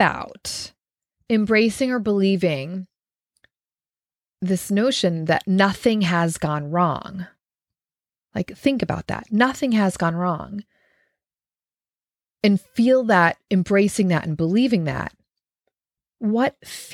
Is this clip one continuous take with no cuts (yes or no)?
no